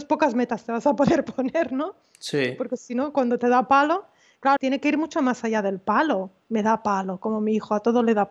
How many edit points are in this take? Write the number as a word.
one